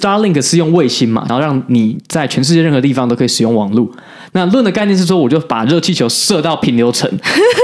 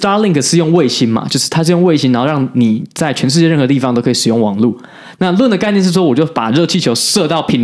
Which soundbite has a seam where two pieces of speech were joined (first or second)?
first